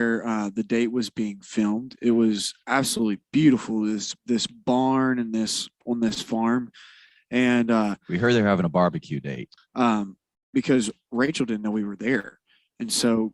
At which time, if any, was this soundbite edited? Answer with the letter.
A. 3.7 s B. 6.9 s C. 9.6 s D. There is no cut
C